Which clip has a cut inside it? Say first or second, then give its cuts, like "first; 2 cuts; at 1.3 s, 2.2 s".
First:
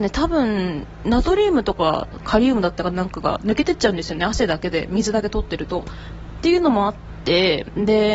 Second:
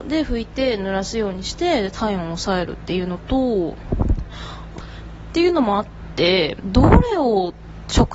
second; 2 cuts; at 4.7 s, 6.6 s